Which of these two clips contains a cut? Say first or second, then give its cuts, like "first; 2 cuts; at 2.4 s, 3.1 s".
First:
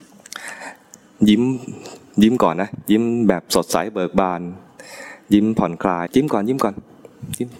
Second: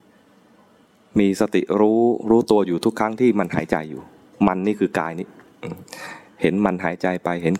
first; 1 cut; at 6.1 s